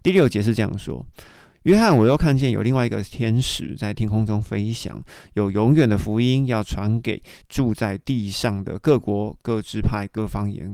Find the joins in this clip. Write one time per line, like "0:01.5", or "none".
none